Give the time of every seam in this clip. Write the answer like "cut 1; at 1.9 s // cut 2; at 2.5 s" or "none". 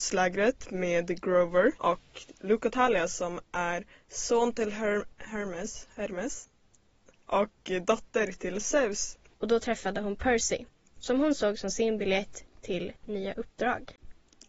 cut 1; at 1.8 s // cut 2; at 9.3 s